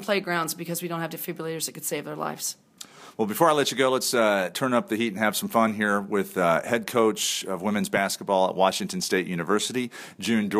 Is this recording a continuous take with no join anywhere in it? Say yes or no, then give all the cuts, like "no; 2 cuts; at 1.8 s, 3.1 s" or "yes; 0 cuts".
yes; 0 cuts